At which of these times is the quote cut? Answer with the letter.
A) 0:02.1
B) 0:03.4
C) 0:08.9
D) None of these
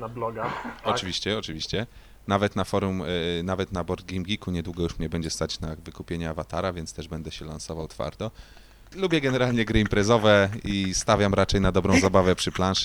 C